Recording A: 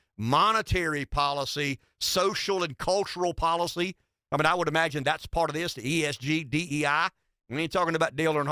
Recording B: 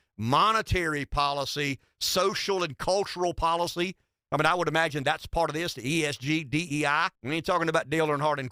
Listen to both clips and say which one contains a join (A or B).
B